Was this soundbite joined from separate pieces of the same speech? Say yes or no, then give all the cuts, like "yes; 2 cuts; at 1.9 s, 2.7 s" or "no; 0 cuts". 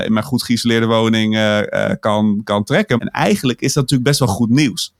yes; 1 cut; at 3.0 s